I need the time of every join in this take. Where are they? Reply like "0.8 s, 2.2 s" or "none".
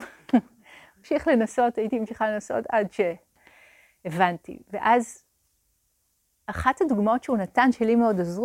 none